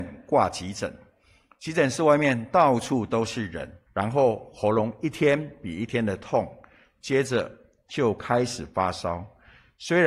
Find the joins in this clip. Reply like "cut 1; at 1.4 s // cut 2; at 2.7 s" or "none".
cut 1; at 3.9 s

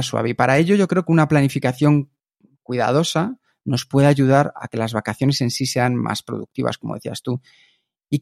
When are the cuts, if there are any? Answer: none

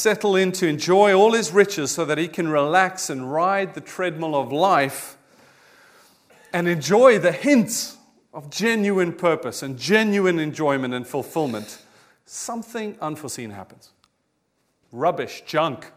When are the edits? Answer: cut 1; at 14.8 s

